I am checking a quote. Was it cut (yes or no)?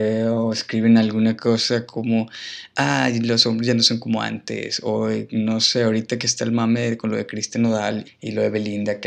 yes